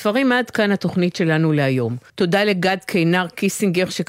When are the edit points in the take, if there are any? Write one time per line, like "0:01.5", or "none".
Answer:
0:02.1